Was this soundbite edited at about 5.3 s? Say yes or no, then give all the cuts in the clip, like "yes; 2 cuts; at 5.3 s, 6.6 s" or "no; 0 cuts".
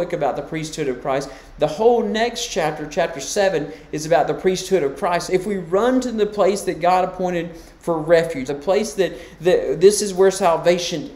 yes; 2 cuts; at 5.3 s, 8.5 s